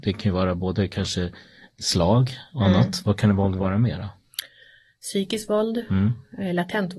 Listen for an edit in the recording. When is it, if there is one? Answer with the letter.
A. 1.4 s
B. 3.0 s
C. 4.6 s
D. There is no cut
D